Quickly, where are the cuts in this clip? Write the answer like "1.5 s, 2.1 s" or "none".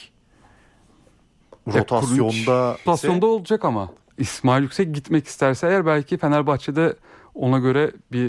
2.9 s, 4.1 s